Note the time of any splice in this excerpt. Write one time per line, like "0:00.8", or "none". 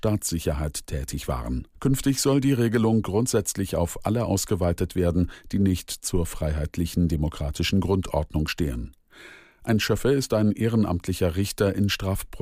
0:01.7